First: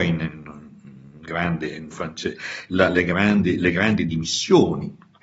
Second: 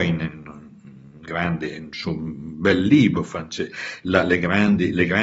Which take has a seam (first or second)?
first